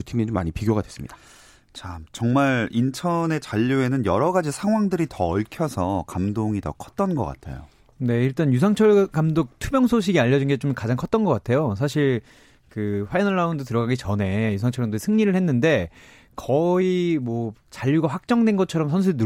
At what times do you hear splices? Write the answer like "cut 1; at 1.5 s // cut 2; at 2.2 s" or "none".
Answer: none